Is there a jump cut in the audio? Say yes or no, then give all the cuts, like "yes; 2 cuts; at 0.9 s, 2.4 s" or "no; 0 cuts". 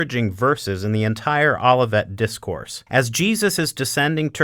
yes; 1 cut; at 2.9 s